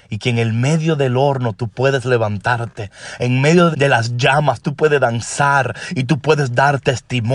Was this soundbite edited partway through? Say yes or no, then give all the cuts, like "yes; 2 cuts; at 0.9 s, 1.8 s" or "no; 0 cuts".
yes; 1 cut; at 3.7 s